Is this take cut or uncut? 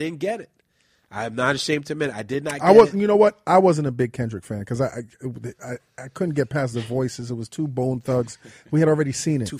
uncut